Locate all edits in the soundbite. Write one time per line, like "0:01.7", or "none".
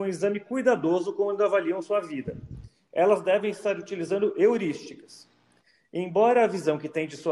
none